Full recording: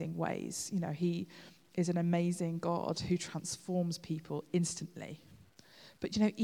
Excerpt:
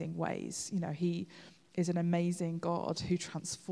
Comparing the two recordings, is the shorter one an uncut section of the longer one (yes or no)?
yes